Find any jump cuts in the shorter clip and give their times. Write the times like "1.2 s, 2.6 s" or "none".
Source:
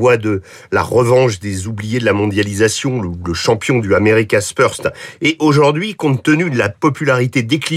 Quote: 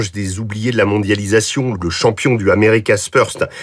1.7 s